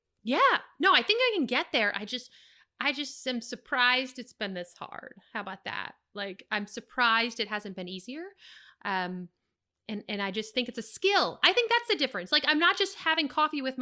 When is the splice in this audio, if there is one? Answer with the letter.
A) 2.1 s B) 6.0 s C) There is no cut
C